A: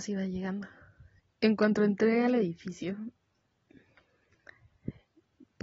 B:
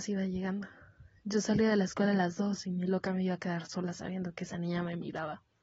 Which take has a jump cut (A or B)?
A